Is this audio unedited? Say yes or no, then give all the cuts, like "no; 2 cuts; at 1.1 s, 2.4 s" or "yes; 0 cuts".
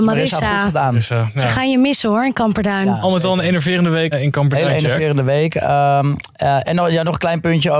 no; 1 cut; at 4.1 s